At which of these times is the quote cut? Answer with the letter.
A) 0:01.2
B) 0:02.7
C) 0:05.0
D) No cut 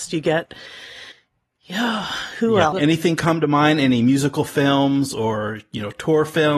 B